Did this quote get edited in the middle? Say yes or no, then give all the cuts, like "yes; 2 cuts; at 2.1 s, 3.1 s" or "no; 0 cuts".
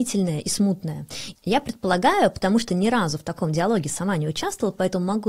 yes; 1 cut; at 1.3 s